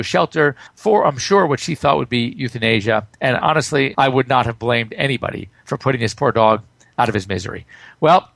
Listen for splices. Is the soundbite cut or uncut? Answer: cut